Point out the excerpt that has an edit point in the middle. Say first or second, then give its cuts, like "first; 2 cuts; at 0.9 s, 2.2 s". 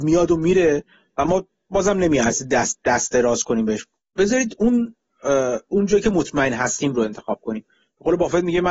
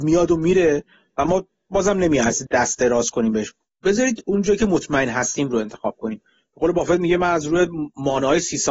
second; 2 cuts; at 2.5 s, 4.2 s